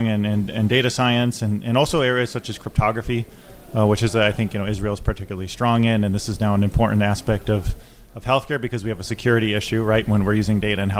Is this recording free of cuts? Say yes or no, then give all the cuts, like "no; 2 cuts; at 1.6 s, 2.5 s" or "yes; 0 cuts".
yes; 0 cuts